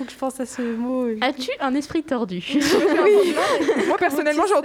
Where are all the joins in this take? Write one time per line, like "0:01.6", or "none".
none